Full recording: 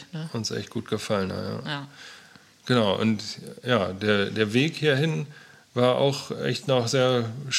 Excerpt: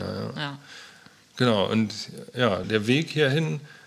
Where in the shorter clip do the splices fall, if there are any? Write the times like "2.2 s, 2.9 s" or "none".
2.6 s